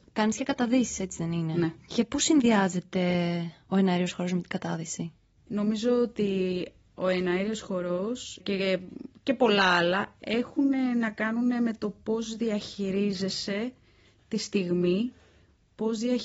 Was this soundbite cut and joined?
yes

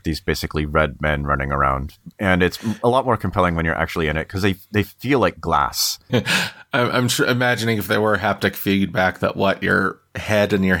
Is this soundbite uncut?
no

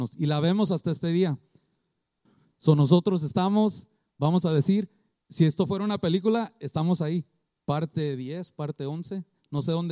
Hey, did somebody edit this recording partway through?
yes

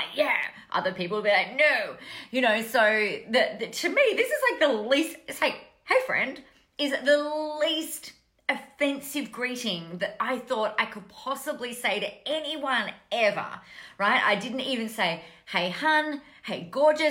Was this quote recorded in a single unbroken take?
yes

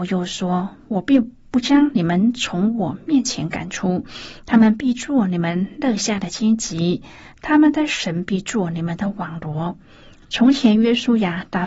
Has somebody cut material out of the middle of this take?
yes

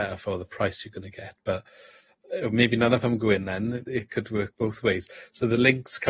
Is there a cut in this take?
no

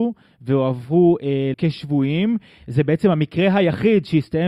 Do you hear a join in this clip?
yes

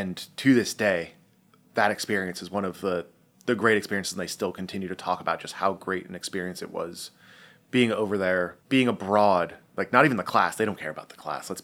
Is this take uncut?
yes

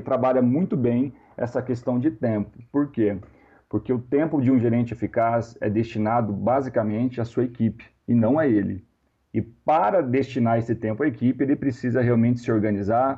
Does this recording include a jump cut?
no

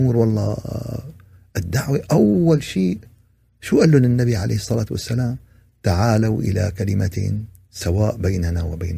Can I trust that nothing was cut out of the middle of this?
yes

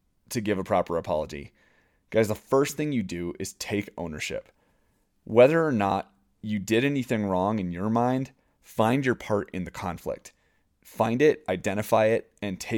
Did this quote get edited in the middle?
no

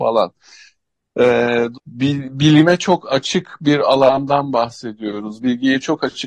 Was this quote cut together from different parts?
yes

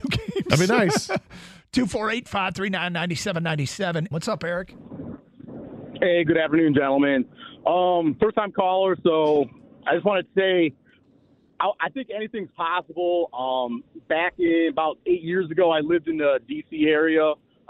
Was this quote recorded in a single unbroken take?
no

